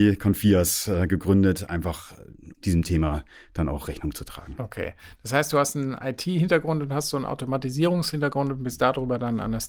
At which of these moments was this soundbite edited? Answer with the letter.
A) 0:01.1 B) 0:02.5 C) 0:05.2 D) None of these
B